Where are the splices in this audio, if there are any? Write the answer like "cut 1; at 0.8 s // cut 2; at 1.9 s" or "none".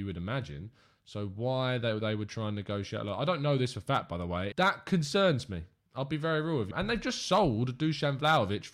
cut 1; at 4.5 s // cut 2; at 6.7 s